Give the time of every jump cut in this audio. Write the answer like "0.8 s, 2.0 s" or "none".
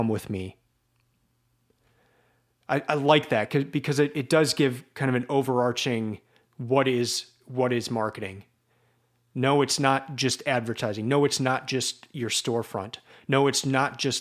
none

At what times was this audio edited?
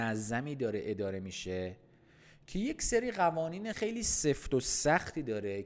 3.7 s

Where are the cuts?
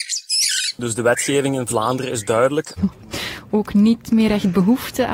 2.8 s

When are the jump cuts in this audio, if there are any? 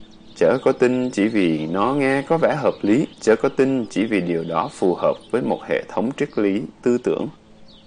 3.1 s

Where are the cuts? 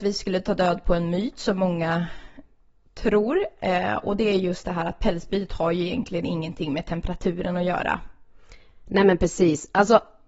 none

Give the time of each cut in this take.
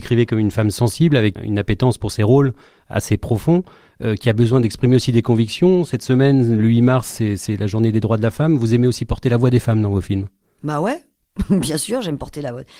1.4 s

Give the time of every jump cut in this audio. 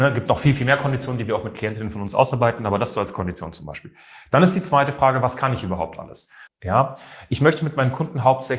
6.5 s

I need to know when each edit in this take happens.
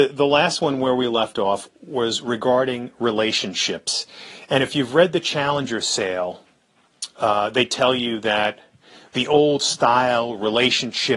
none

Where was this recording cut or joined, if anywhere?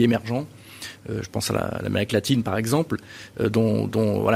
none

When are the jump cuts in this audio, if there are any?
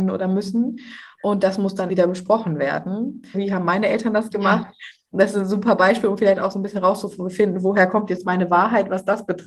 1.9 s, 3.3 s

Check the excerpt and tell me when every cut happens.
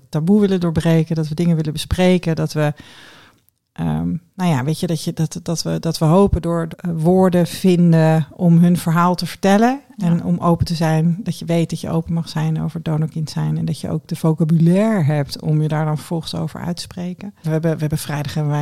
6.7 s, 17.4 s

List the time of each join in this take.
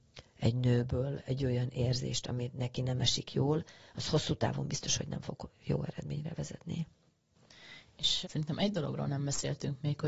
8.2 s

